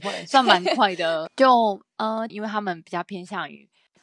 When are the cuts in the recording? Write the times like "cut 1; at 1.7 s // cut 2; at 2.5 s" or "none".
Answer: cut 1; at 1.3 s // cut 2; at 2.3 s